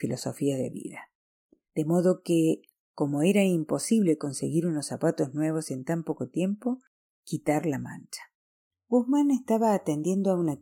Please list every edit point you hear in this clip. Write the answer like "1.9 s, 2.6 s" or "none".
7.1 s, 8.7 s